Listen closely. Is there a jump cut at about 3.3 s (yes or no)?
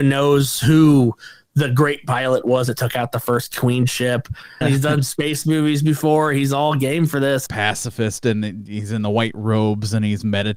no